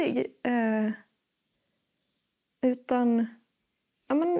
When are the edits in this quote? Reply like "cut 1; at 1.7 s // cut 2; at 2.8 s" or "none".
none